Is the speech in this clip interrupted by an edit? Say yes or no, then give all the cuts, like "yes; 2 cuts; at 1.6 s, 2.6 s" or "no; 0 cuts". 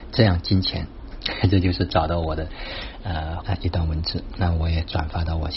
yes; 2 cuts; at 1.1 s, 3.4 s